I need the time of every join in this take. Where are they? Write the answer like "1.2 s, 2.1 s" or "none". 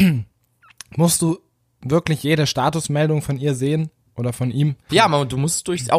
4.9 s